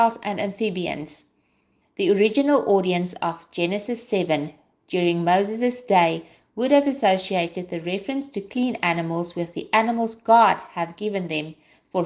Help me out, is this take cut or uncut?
cut